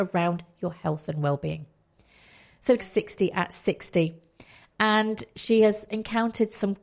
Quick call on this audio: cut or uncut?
cut